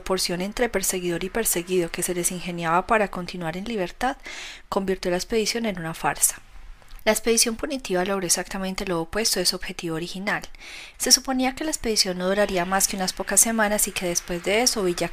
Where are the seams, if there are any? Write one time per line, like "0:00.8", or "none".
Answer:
0:07.0
0:10.9